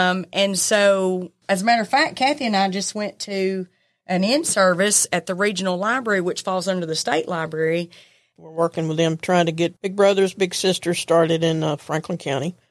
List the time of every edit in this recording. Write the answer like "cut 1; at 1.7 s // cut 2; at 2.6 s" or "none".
cut 1; at 1.4 s // cut 2; at 8.4 s // cut 3; at 9.8 s